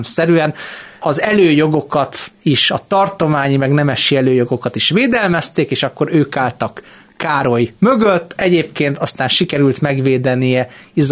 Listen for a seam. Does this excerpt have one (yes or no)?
yes